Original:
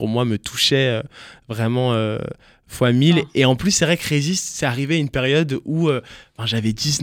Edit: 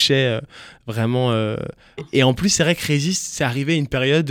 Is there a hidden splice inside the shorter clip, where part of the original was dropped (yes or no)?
yes